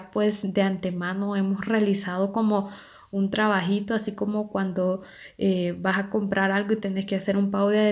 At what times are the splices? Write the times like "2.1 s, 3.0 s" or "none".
none